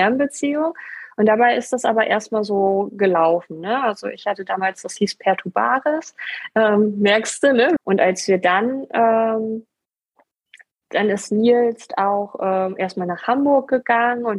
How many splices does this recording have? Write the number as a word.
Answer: one